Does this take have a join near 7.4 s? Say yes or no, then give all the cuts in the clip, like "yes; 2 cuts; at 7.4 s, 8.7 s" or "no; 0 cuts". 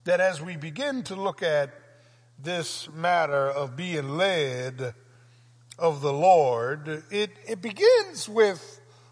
yes; 1 cut; at 7.4 s